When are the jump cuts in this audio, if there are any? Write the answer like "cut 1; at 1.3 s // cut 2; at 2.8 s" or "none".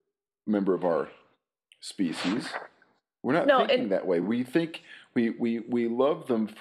none